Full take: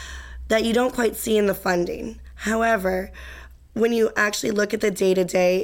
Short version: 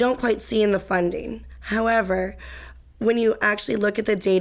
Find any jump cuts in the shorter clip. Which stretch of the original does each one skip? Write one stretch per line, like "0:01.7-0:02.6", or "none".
none